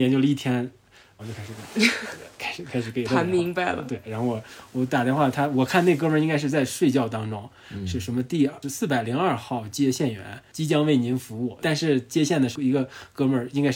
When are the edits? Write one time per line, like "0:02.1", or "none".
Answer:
0:01.2